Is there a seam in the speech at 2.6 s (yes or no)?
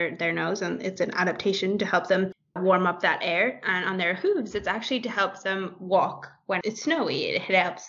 yes